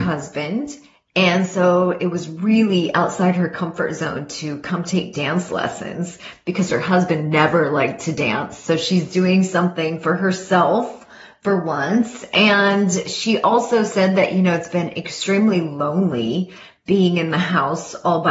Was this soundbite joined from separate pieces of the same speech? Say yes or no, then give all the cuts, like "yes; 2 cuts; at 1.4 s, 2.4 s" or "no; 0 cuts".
no; 0 cuts